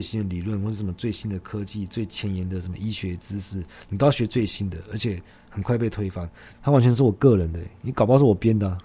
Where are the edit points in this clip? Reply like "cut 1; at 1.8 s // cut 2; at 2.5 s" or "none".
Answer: cut 1; at 6.5 s

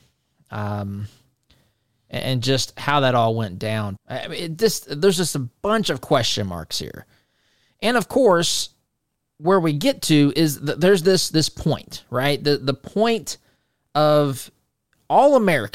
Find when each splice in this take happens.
cut 1; at 4.0 s

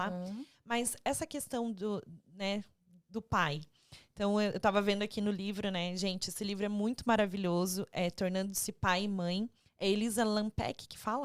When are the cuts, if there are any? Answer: none

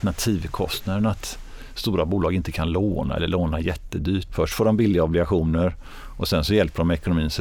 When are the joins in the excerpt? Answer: cut 1; at 4.3 s

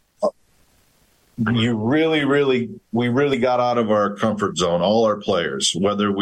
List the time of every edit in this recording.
none

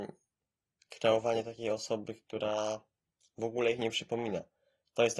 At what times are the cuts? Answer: none

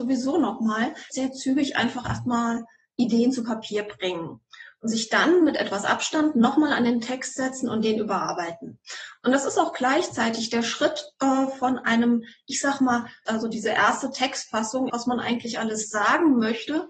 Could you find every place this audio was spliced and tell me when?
cut 1; at 1.1 s // cut 2; at 13.3 s // cut 3; at 14.9 s

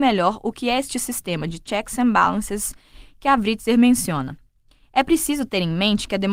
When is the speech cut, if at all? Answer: none

